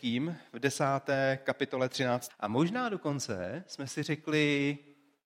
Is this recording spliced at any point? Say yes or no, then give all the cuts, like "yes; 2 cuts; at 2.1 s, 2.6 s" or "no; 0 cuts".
yes; 1 cut; at 2.3 s